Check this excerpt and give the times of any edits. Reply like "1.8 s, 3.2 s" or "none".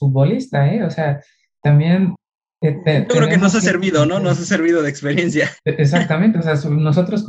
5.6 s